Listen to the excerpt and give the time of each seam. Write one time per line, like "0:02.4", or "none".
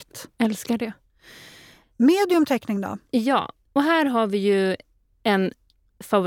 none